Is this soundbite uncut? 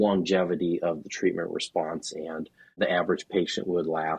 yes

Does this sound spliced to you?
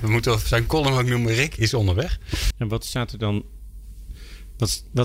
yes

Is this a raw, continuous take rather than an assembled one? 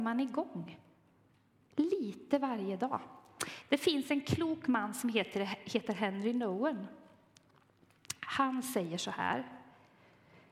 yes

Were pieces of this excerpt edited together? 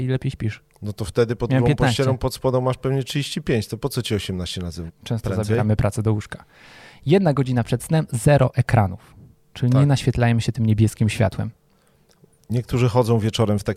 yes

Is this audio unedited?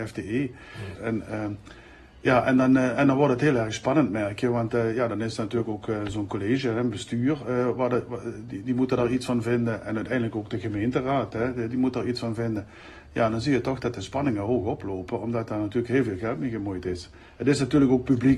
no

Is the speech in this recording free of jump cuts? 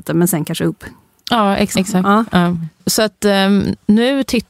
no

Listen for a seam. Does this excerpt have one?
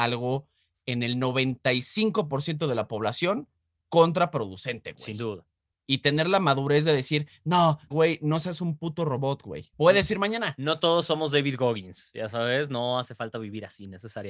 yes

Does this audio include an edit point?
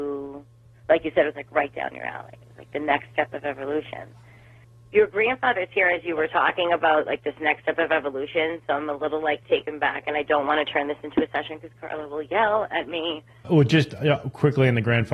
no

